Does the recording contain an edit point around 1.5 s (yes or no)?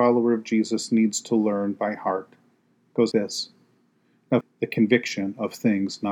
no